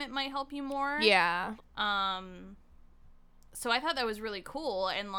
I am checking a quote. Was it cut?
yes; 1 cut; at 1.6 s

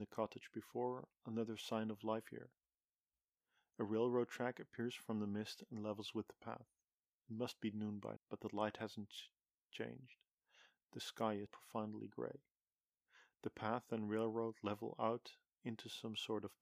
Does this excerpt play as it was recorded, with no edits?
no; 2 cuts; at 8.2 s, 11.5 s

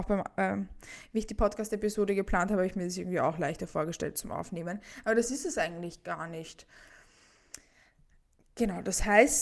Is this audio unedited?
yes; 0 cuts

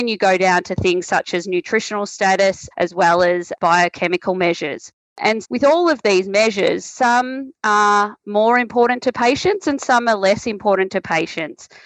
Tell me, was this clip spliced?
yes; 2 cuts; at 2.7 s, 5.4 s

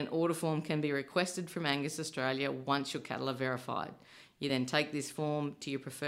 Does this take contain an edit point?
no; 0 cuts

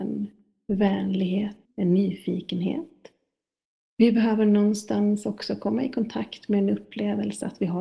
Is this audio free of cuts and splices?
no; 2 cuts; at 1.6 s, 3.9 s

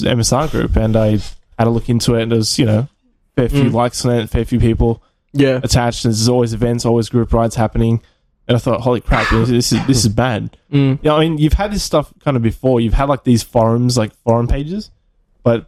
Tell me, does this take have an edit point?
no; 0 cuts

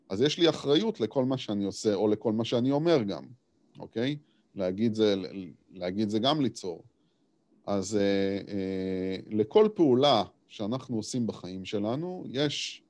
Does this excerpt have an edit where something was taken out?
no; 0 cuts

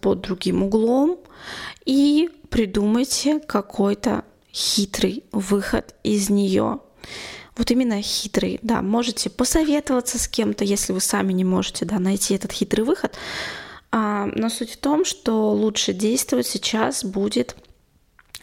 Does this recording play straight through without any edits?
yes; 0 cuts

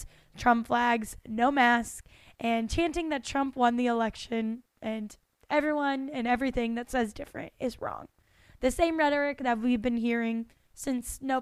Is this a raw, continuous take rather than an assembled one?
yes; 0 cuts

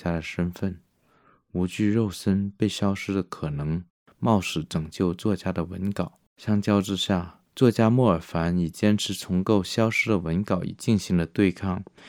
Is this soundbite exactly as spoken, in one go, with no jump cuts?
no; 2 cuts; at 6.3 s, 7.5 s

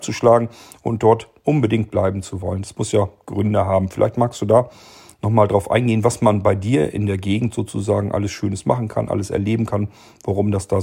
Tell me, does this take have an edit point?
no; 0 cuts

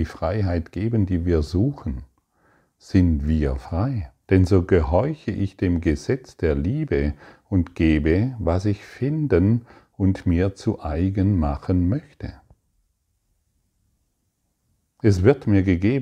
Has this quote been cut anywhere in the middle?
yes; 1 cut; at 4.2 s

